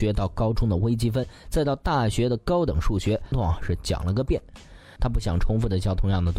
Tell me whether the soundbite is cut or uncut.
cut